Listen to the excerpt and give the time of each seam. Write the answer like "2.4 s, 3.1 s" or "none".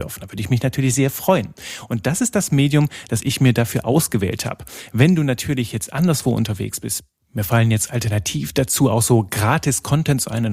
none